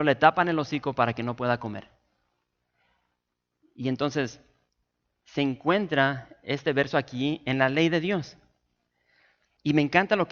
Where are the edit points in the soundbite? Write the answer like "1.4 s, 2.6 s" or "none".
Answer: none